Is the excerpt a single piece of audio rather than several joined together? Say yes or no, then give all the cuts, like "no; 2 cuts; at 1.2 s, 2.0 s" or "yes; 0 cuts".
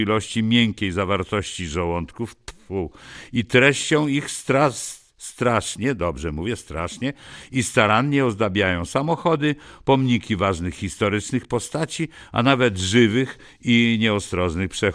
yes; 0 cuts